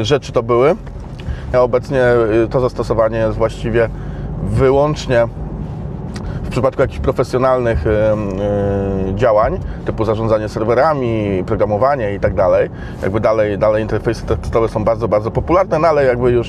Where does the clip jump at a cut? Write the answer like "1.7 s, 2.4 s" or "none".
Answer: 1.5 s, 6.2 s